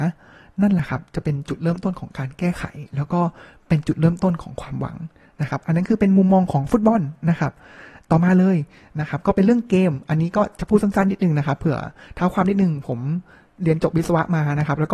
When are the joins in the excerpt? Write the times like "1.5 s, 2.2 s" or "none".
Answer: none